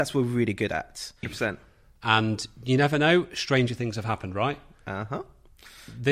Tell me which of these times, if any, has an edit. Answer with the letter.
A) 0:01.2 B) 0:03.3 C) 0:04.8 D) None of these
A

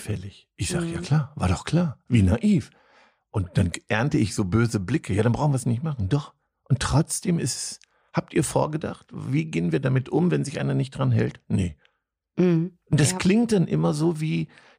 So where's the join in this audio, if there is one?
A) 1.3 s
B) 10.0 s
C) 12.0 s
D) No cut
D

